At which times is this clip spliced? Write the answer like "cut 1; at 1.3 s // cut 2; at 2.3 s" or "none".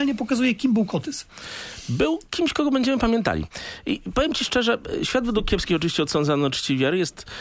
none